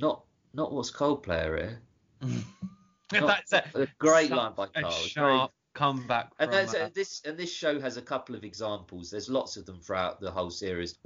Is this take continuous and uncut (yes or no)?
yes